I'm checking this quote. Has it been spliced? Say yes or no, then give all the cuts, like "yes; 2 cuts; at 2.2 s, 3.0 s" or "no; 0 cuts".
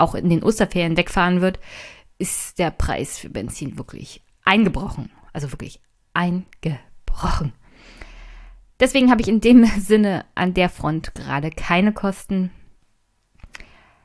no; 0 cuts